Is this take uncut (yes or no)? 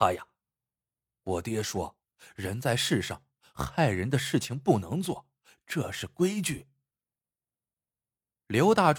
yes